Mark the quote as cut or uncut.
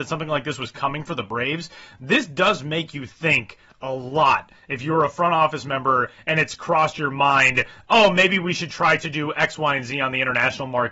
uncut